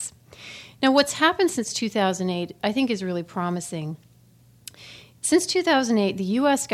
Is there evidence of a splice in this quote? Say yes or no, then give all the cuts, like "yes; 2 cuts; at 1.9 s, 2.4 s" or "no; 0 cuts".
no; 0 cuts